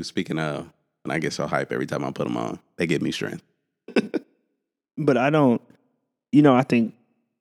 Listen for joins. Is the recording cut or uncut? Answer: cut